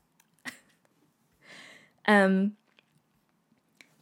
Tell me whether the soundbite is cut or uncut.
uncut